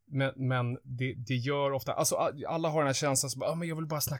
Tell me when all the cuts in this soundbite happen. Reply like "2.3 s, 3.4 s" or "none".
1.1 s